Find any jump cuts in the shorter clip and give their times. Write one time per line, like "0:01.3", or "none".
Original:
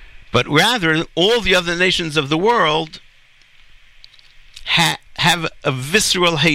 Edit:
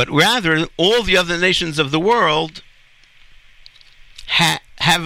none